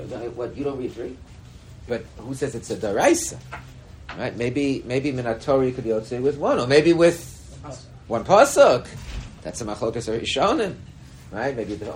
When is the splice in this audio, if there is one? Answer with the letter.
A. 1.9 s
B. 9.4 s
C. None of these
A